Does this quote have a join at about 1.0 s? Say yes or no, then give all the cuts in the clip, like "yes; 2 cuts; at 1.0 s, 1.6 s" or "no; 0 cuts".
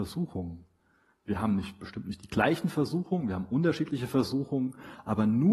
no; 0 cuts